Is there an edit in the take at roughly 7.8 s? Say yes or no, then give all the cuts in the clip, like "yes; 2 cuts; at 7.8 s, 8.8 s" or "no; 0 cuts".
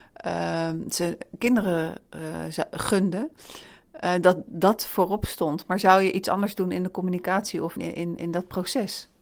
yes; 1 cut; at 7.8 s